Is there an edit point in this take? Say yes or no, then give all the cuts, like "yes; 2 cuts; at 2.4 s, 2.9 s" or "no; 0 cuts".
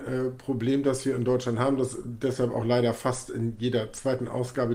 no; 0 cuts